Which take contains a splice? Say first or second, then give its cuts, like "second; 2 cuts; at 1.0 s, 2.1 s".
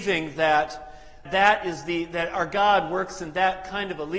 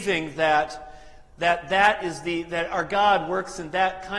first; 1 cut; at 1.2 s